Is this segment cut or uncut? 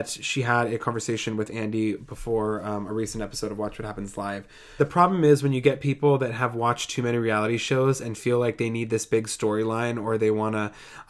cut